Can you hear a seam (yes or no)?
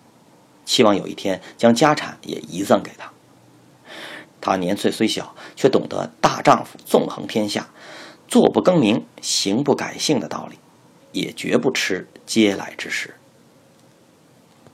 yes